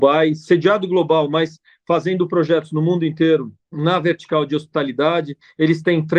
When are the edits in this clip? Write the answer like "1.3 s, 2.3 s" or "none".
3.6 s